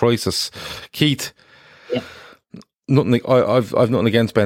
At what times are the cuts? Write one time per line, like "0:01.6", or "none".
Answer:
none